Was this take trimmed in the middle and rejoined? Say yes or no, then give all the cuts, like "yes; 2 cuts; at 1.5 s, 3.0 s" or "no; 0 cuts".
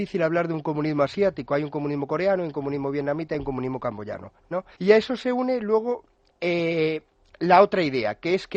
yes; 1 cut; at 4.7 s